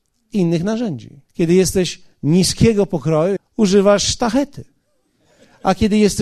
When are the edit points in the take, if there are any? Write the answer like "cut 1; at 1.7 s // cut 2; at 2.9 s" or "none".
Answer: cut 1; at 1.2 s // cut 2; at 3.4 s